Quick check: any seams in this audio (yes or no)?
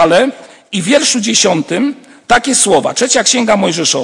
no